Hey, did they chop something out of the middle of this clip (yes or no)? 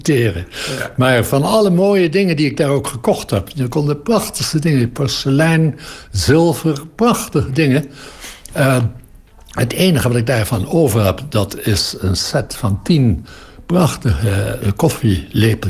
yes